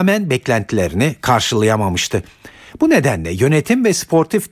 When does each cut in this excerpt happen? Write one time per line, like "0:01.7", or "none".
none

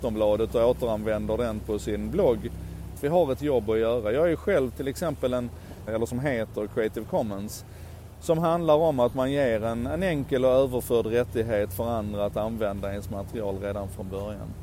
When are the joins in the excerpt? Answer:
0:03.0
0:05.9

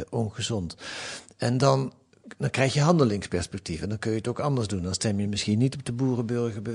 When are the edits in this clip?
none

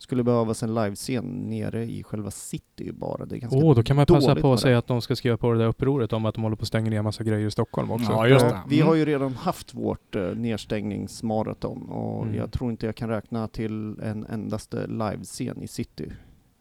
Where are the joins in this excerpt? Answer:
none

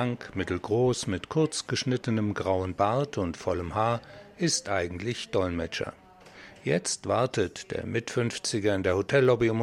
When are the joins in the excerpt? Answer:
none

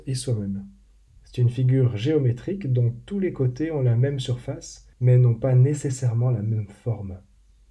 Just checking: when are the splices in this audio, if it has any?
0:01.1
0:04.9

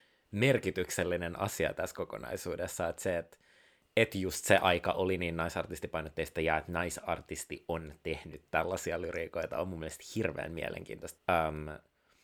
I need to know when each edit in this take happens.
0:11.2

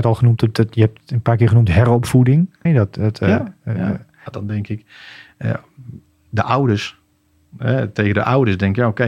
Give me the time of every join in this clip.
0:02.7
0:04.3

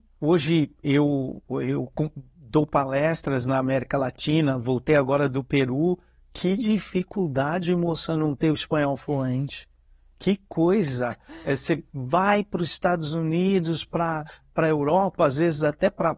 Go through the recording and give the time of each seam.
none

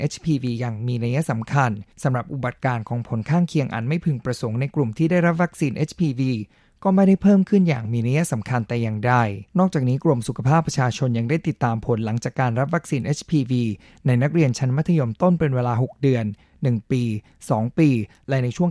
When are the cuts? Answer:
0:01.9
0:09.5

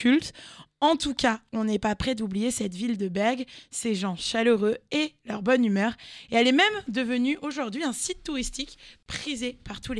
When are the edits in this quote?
none

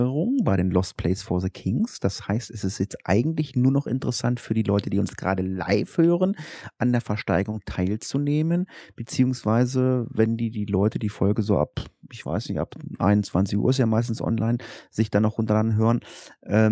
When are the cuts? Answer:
none

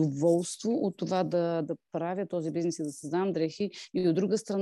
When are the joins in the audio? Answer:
none

